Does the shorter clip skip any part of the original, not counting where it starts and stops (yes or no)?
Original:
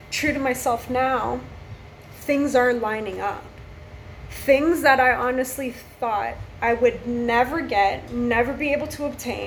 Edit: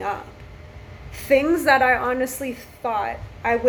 no